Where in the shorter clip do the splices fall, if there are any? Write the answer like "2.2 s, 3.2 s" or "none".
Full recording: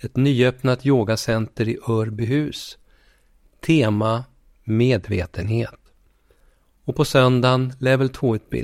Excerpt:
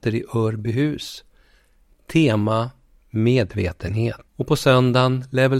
4.3 s